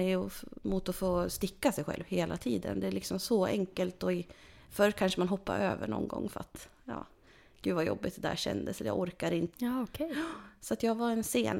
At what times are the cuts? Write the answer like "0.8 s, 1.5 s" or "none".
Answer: 9.5 s